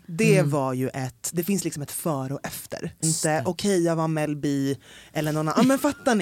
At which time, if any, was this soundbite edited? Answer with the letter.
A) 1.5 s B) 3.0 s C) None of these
B